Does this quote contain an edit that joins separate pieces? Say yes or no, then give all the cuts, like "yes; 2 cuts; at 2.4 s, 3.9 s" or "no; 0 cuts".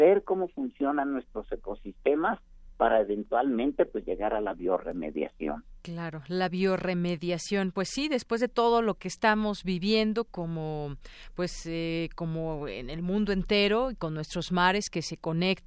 no; 0 cuts